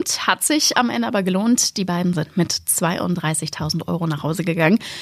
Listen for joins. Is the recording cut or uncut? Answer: uncut